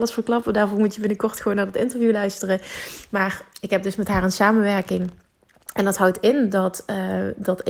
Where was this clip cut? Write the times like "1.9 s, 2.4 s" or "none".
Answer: none

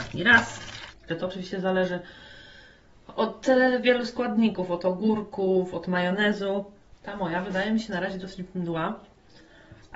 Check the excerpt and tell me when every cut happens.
1.1 s

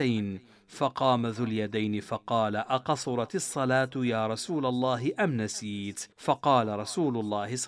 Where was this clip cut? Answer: 6.1 s

